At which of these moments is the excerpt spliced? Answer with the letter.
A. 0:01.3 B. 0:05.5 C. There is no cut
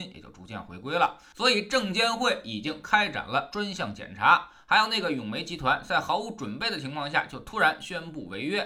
A